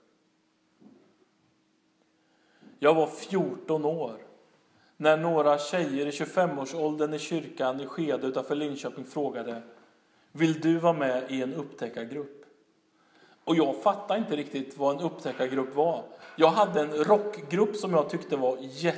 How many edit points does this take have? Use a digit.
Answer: 0